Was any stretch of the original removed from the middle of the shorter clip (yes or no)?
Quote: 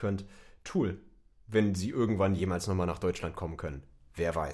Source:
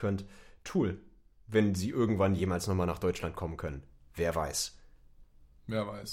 no